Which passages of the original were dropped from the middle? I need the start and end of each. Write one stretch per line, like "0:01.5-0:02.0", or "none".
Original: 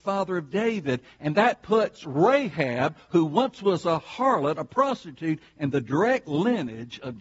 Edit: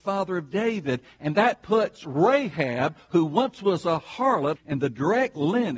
0:04.6-0:05.5